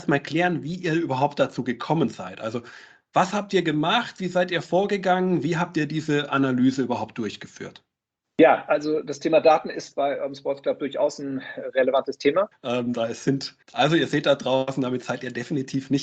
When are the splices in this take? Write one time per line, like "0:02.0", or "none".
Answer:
0:12.5
0:13.6